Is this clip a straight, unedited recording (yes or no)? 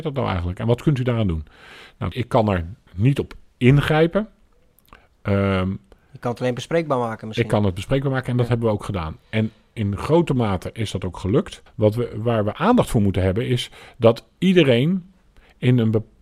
no